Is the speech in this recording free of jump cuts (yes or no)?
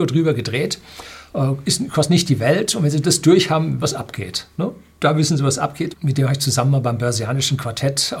no